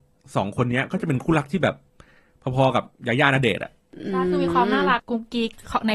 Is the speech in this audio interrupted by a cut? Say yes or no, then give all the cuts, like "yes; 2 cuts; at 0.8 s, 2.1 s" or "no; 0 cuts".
yes; 1 cut; at 5.0 s